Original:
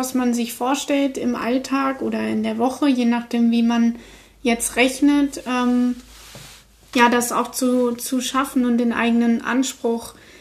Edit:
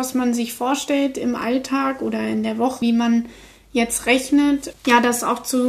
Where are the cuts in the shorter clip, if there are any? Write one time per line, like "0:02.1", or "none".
0:02.8
0:04.7